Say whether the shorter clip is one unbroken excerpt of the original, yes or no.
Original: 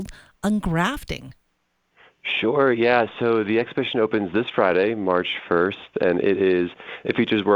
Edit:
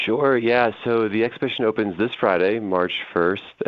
yes